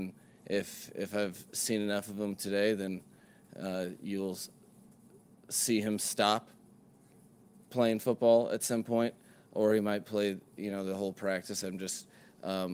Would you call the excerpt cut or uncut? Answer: uncut